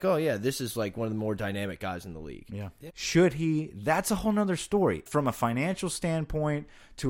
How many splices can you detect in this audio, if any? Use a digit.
2